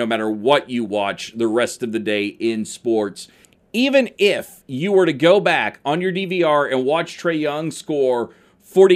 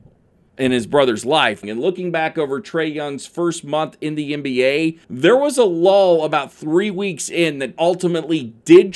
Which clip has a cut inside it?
second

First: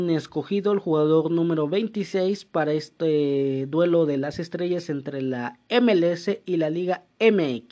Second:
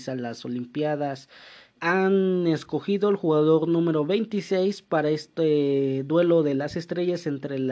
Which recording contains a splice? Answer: second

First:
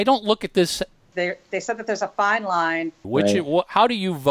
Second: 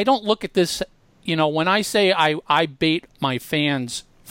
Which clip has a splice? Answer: first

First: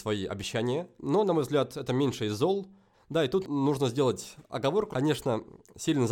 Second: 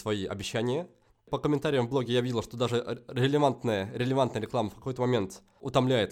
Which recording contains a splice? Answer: first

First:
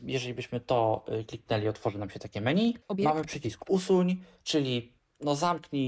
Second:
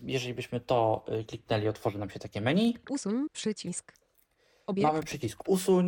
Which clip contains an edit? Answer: first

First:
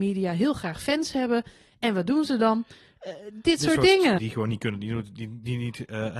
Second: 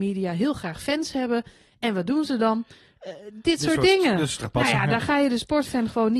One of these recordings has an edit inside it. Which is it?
first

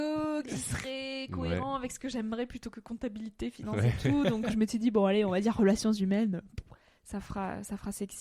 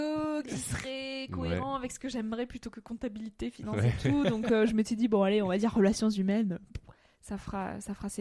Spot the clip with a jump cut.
first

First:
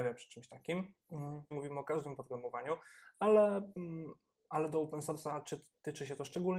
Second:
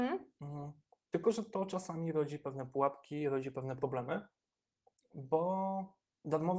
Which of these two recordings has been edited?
first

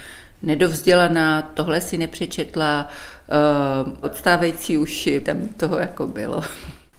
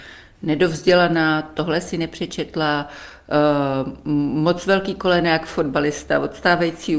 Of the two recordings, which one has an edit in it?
first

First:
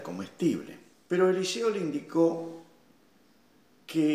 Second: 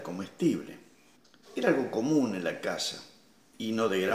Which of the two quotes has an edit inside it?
first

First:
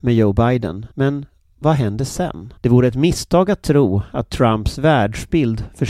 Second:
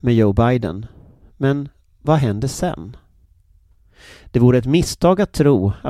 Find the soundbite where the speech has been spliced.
first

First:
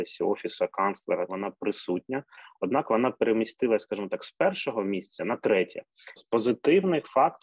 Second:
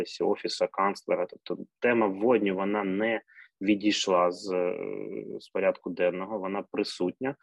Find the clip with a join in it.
first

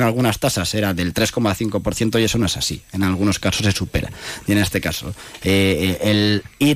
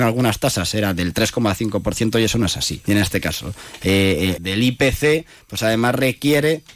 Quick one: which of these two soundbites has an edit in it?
second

